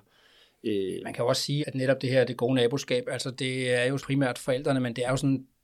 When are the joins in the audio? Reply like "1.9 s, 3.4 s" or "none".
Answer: 1.6 s, 4.0 s